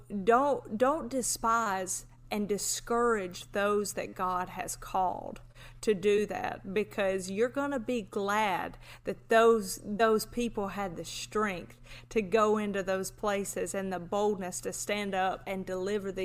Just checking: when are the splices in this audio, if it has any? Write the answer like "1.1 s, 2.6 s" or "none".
none

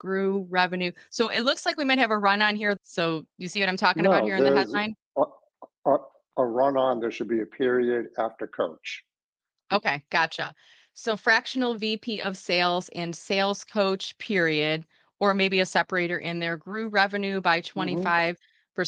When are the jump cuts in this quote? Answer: 2.8 s

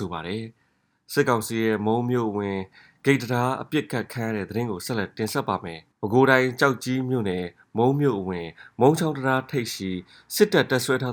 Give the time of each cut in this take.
5.9 s

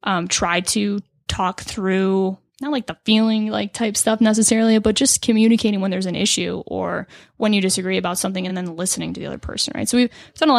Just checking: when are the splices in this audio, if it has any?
none

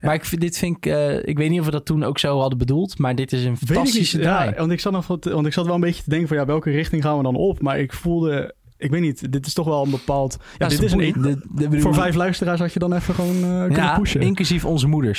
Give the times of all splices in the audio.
11.1 s

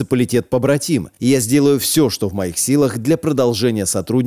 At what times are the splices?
none

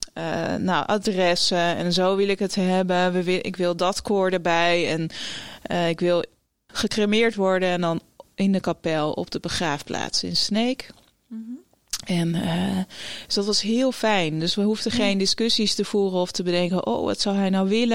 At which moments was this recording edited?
6.7 s

